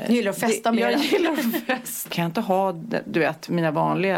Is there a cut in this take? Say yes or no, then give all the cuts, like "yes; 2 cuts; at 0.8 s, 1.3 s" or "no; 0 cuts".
yes; 1 cut; at 2.1 s